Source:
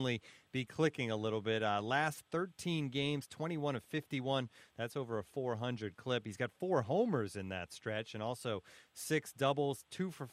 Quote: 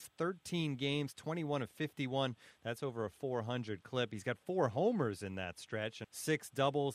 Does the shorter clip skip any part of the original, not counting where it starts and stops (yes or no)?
yes